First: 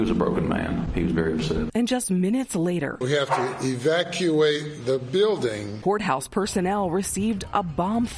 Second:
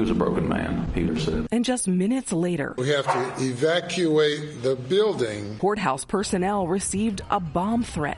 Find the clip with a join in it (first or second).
second